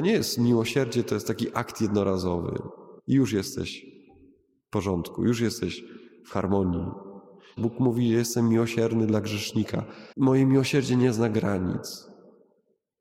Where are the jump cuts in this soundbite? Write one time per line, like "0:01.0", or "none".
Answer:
0:03.0
0:07.6
0:10.1